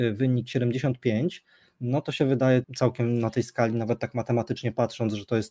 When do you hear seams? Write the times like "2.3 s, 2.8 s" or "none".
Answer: 2.6 s